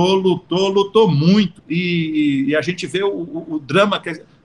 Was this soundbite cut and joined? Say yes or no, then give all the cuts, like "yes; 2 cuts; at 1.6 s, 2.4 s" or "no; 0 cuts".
yes; 1 cut; at 1.6 s